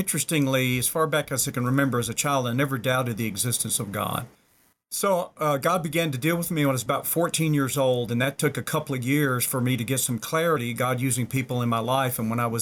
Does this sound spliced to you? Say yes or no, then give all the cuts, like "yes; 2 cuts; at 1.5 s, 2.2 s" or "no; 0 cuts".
no; 0 cuts